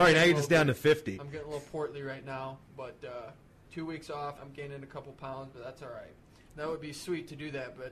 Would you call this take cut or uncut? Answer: cut